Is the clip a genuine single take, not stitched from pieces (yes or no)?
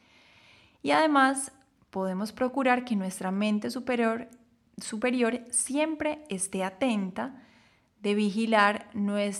yes